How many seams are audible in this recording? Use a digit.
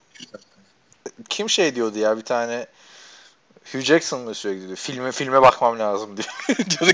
1